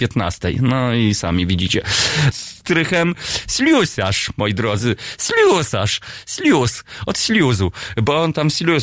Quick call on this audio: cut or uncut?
cut